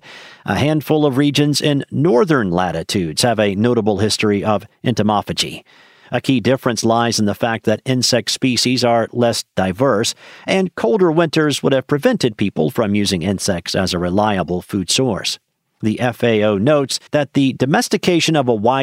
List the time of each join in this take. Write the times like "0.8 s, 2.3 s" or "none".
6.0 s, 17.1 s